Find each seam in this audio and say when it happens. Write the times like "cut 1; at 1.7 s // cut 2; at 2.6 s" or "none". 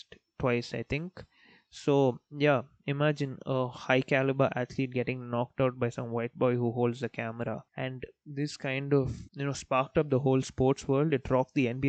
cut 1; at 7.7 s // cut 2; at 9.3 s